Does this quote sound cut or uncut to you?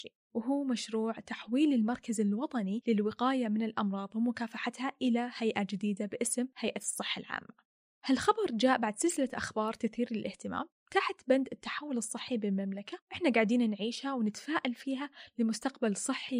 uncut